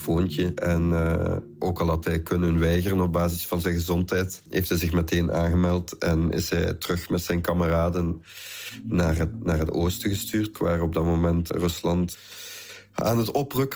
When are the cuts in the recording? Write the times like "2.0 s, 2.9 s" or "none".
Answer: 10.5 s